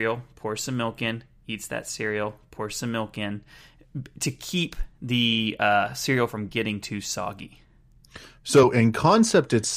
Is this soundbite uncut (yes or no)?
yes